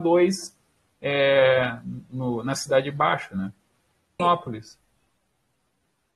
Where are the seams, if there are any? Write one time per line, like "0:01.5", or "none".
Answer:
0:04.2